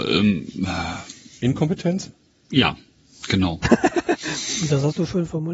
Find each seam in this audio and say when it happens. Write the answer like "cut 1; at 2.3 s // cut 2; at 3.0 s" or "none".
none